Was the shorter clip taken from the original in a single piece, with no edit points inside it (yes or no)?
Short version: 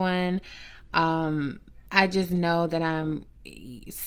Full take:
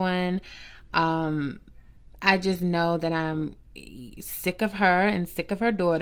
no